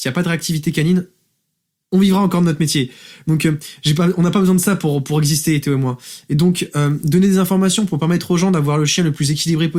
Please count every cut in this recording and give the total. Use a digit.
0